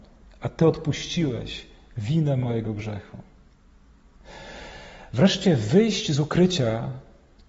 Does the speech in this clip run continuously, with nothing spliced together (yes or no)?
yes